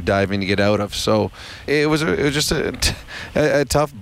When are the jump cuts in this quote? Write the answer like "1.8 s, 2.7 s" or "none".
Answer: 1.7 s